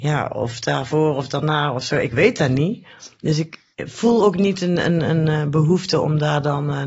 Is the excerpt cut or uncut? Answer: uncut